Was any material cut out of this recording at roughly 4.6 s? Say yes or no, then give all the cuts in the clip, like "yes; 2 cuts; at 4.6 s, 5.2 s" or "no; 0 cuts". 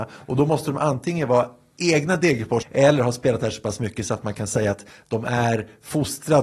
no; 1 cut; at 2.6 s